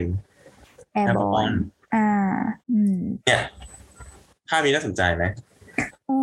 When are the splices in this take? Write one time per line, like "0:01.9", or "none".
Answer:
0:02.6